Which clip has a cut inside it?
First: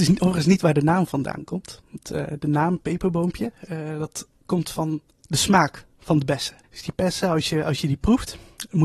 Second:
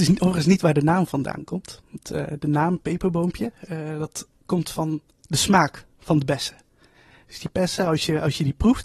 first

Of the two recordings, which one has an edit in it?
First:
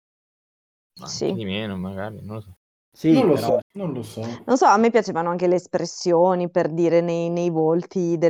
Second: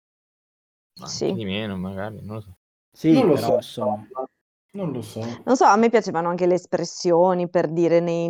first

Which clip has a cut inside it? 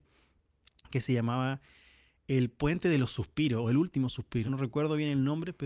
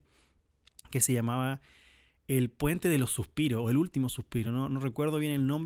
first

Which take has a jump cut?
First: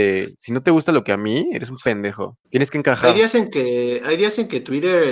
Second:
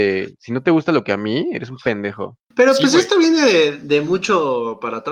first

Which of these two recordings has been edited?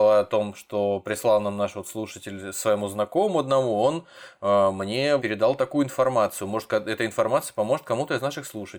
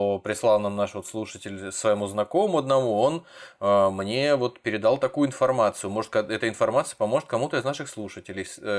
first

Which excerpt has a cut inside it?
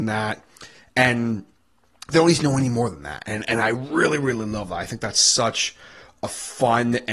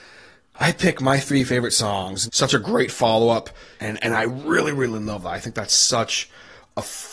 second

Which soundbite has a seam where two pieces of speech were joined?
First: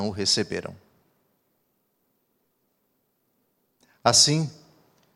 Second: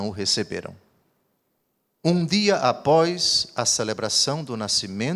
second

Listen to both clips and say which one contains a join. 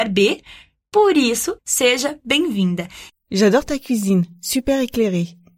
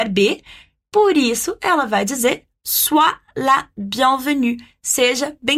first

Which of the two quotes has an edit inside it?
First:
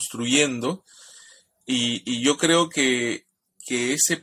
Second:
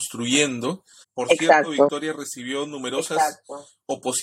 second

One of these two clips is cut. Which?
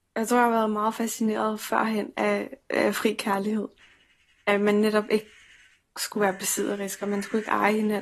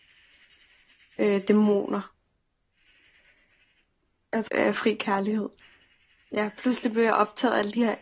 second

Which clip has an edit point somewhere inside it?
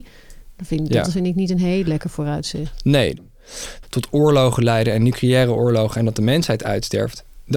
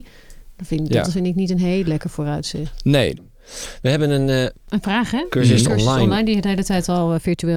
first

